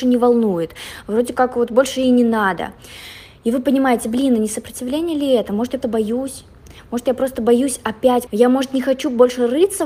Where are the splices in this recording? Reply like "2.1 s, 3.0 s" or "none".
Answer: 5.8 s, 8.3 s